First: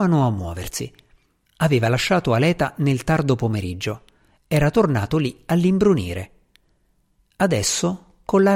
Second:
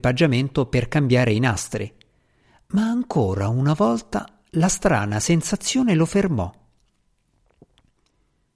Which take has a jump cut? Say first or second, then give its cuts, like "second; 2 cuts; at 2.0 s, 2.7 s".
first; 1 cut; at 1.4 s